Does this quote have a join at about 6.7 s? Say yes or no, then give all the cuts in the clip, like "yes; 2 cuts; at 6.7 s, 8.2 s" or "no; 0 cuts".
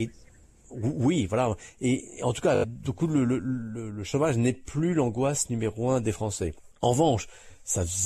yes; 1 cut; at 6.7 s